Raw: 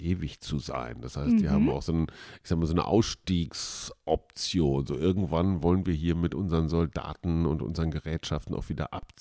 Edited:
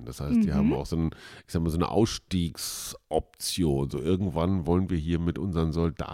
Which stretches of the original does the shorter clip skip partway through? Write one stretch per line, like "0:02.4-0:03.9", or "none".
none